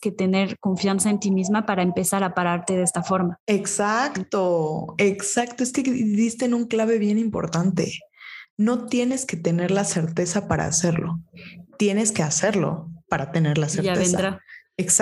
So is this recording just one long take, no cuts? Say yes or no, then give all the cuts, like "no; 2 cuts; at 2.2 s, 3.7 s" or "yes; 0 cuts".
yes; 0 cuts